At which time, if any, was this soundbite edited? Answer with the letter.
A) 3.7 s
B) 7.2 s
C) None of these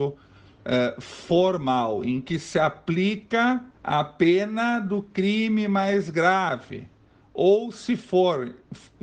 A